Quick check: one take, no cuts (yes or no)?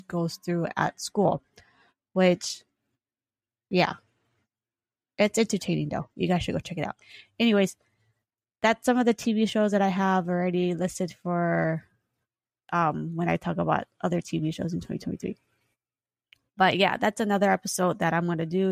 yes